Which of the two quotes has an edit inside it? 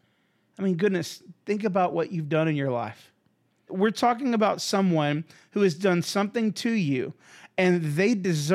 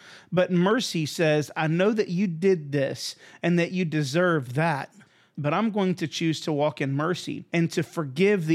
first; 1 cut; at 3.7 s

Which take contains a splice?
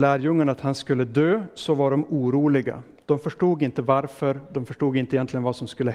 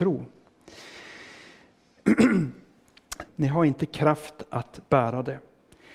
second; 1 cut; at 3.3 s

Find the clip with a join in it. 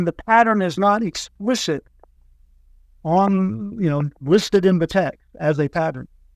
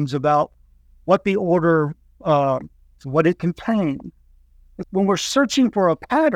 second; 2 cuts; at 3.0 s, 4.8 s

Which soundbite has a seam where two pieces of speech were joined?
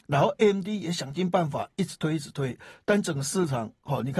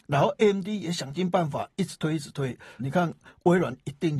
second; 1 cut; at 2.8 s

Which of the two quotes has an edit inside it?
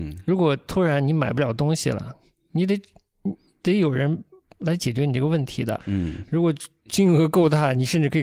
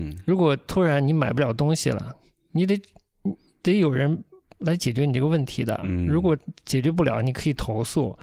first; 1 cut; at 5.8 s

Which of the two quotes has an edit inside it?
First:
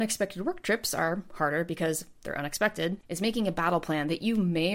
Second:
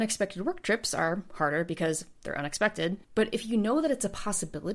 first; 1 cut; at 3.0 s

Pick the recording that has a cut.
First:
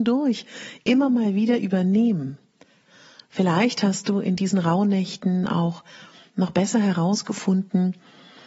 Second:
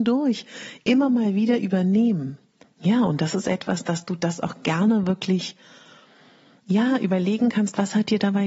second; 1 cut; at 2.6 s

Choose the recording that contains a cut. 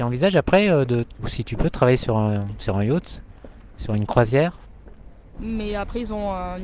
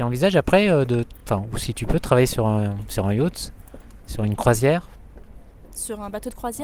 first; 2 cuts; at 1.2 s, 5.4 s

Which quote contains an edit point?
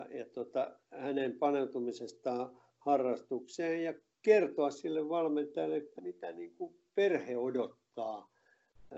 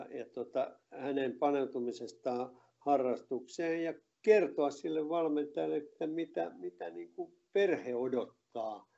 first; 1 cut; at 6.0 s

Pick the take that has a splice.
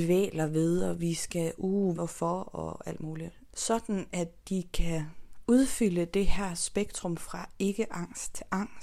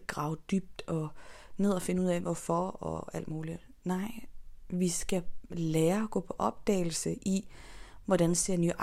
first; 2 cuts; at 1.9 s, 3.5 s

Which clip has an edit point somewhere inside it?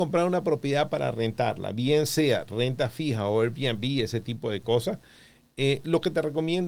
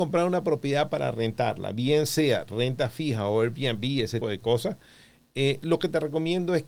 second; 1 cut; at 4.2 s

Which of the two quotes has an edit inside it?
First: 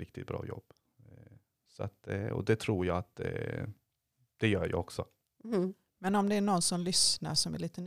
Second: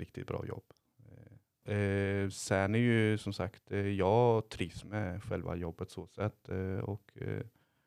second; 1 cut; at 1.6 s

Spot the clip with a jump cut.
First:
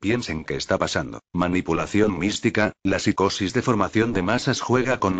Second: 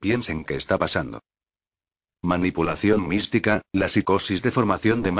first; 1 cut; at 1.3 s

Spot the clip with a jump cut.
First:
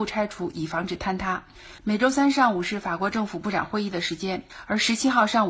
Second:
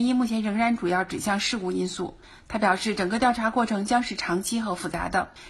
first; 1 cut; at 1.8 s

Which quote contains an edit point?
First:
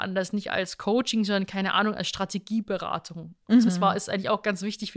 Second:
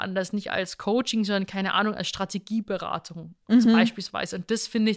first; 1 cut; at 3.7 s

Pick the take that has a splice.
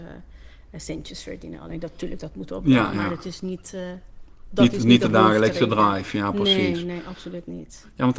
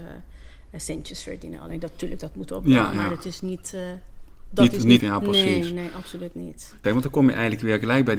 second; 2 cuts; at 5.0 s, 6.8 s

